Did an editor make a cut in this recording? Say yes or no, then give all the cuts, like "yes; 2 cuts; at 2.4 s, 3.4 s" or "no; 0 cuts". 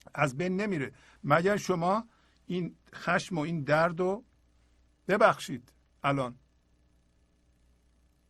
no; 0 cuts